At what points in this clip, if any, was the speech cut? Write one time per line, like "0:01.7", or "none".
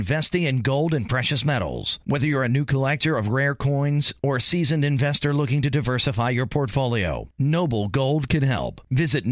0:02.0